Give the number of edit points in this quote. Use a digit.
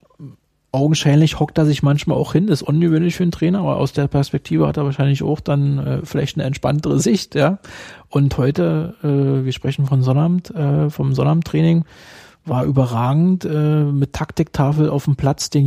0